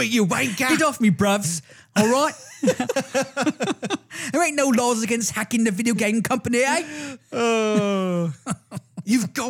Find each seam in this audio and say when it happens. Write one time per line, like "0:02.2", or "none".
0:02.9